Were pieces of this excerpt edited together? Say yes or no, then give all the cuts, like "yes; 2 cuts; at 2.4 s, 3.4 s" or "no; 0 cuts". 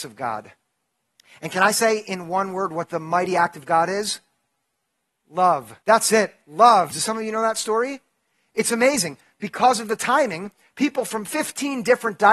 yes; 2 cuts; at 5.8 s, 6.9 s